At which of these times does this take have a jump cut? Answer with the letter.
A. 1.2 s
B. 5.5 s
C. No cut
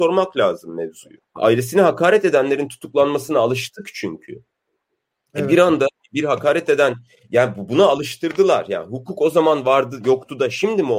A